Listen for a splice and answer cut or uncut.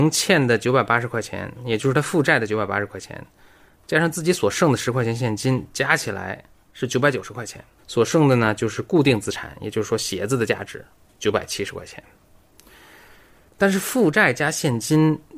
cut